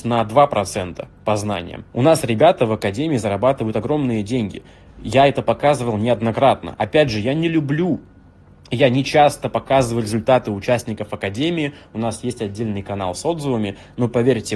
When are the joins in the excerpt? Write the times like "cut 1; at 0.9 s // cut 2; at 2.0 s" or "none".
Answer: cut 1; at 1.9 s